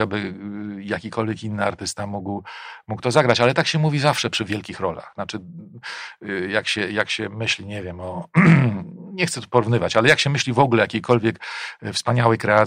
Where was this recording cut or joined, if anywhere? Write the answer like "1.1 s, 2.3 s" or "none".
none